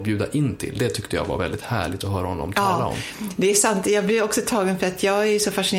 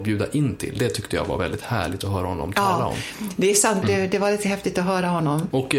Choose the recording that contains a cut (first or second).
second